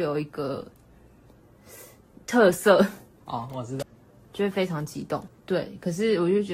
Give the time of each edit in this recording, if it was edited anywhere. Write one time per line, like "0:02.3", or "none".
0:03.8
0:05.3